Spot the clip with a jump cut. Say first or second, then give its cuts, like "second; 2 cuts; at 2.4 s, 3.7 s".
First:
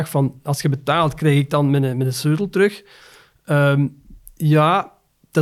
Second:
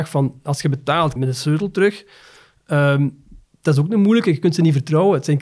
second; 2 cuts; at 1.2 s, 3.4 s